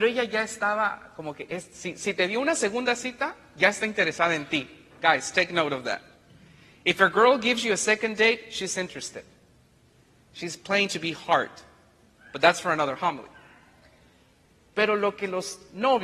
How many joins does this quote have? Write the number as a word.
zero